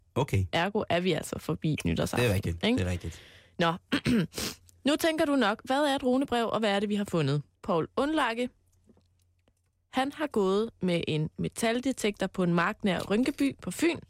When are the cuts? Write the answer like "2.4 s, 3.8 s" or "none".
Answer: 7.5 s